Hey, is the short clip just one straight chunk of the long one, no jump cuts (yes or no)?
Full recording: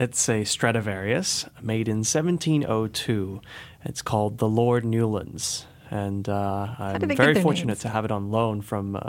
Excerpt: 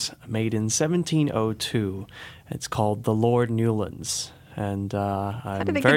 yes